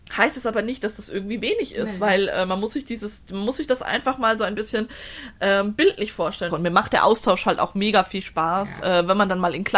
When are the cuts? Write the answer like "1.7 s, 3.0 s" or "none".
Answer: 6.5 s, 8.8 s